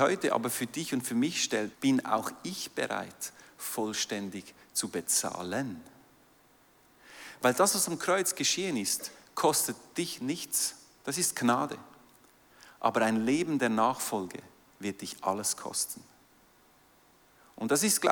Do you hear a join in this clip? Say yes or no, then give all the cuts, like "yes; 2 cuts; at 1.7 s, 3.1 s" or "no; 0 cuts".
yes; 1 cut; at 1.7 s